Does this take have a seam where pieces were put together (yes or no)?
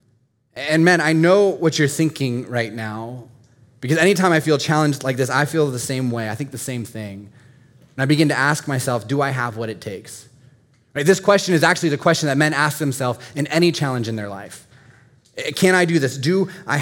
no